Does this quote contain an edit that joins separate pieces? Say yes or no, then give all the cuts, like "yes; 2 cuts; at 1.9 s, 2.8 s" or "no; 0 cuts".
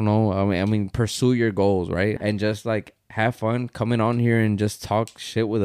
yes; 1 cut; at 2.2 s